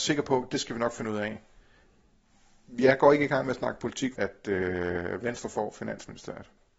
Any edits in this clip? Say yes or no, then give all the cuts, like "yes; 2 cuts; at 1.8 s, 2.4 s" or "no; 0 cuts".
yes; 1 cut; at 4.1 s